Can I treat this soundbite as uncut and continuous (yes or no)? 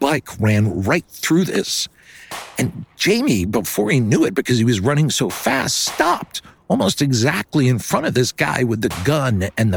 yes